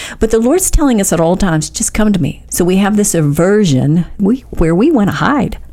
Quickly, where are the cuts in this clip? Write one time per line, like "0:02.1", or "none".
0:02.5
0:04.2